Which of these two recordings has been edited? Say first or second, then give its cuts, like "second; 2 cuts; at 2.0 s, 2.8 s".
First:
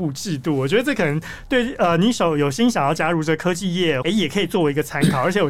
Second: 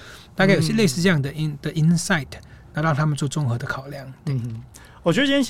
first; 1 cut; at 4.0 s